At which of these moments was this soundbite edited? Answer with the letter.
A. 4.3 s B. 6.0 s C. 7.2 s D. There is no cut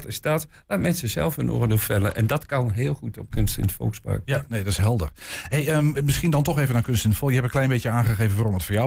B